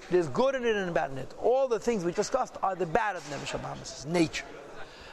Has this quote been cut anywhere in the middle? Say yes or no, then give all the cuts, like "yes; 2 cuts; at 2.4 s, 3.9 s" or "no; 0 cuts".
yes; 1 cut; at 2.1 s